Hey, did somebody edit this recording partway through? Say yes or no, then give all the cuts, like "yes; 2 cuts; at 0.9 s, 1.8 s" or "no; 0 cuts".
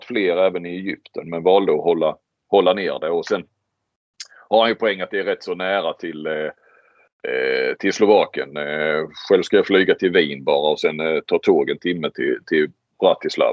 no; 0 cuts